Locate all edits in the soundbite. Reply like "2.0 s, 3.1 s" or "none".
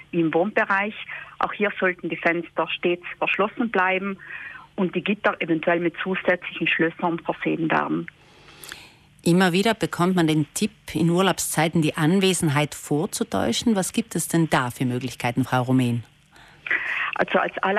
none